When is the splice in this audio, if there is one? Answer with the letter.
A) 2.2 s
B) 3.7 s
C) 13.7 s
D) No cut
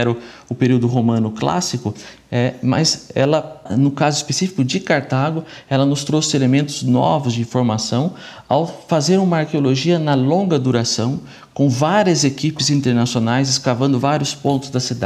D